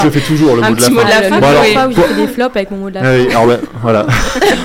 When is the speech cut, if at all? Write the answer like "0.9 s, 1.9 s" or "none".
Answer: none